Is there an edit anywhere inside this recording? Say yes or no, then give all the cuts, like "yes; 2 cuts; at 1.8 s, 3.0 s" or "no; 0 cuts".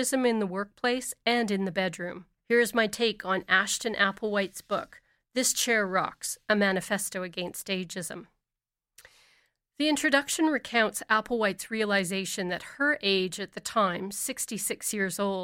yes; 1 cut; at 2.4 s